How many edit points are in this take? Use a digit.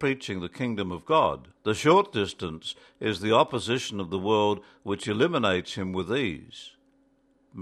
1